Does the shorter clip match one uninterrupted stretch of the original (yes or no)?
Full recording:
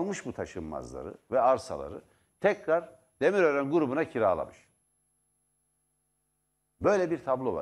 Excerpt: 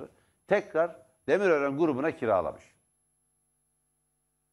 yes